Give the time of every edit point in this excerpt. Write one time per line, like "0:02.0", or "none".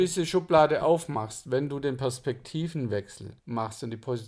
0:03.4